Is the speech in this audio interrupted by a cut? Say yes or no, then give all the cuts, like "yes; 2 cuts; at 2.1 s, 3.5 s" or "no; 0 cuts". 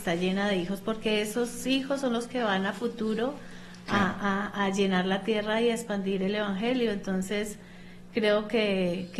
no; 0 cuts